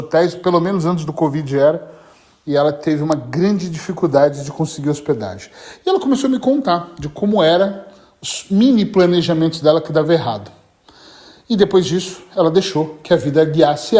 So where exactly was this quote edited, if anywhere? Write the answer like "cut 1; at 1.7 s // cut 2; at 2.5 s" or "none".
none